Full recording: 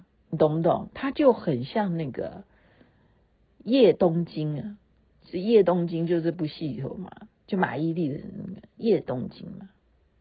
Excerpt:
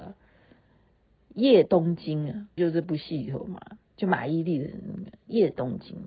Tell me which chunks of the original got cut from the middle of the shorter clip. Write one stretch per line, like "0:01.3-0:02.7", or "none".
0:04.9-0:06.1